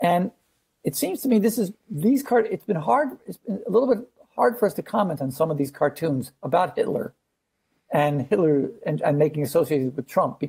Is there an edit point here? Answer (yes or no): no